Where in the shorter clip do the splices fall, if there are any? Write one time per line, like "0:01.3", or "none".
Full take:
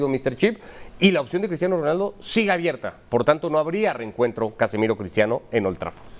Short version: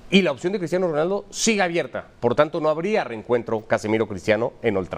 none